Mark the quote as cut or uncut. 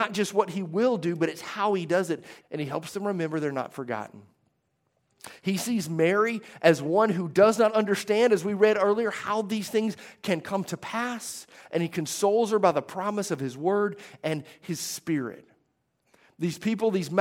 cut